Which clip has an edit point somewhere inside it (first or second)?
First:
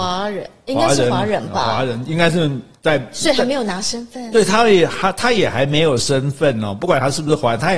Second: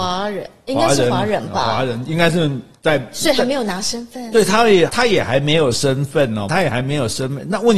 second